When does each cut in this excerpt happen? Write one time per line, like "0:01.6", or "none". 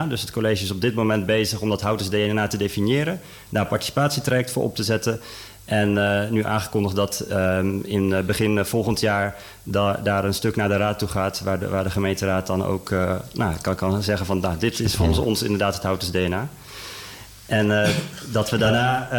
none